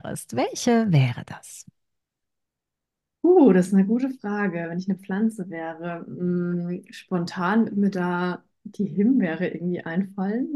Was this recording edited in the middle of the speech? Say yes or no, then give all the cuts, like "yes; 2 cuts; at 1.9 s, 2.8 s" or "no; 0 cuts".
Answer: no; 0 cuts